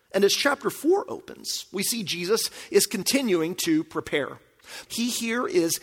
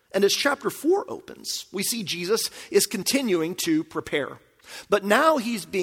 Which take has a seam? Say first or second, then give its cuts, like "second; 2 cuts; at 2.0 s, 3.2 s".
first; 1 cut; at 4.9 s